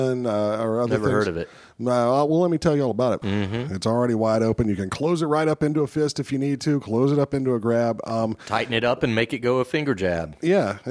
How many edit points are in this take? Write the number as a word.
one